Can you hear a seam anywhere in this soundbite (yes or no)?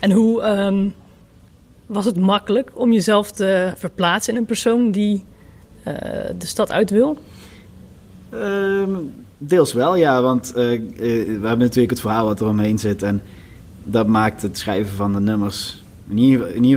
no